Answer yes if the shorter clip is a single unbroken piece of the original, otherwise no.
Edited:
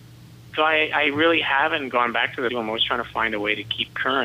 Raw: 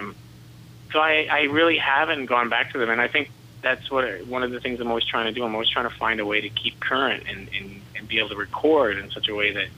no